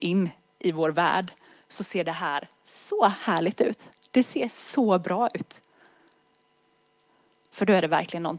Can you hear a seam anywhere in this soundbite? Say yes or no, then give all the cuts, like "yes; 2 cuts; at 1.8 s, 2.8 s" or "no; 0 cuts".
yes; 1 cut; at 7.5 s